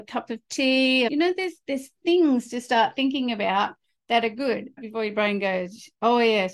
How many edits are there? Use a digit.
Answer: 2